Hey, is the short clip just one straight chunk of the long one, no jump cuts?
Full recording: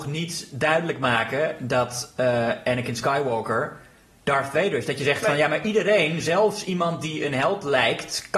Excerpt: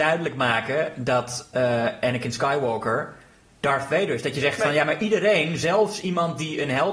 yes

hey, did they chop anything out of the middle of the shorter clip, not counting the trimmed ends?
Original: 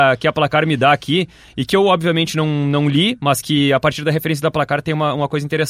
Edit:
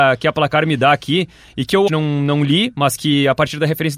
yes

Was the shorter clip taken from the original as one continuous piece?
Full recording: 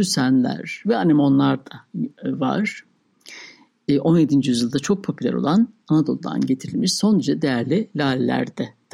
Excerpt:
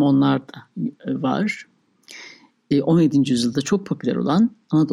yes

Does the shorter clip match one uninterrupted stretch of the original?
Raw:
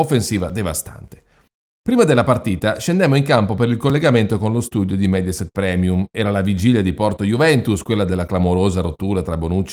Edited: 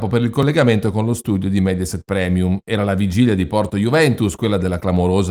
yes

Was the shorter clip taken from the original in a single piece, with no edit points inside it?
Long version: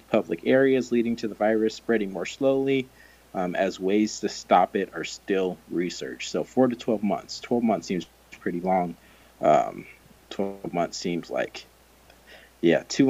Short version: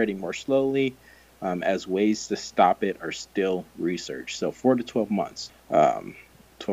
no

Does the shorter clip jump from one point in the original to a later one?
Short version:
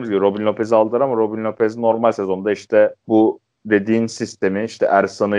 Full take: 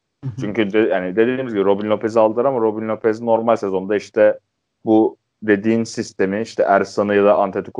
yes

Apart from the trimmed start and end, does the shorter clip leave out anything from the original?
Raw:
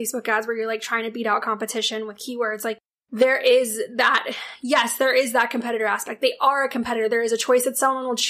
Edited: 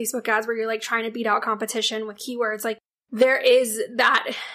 no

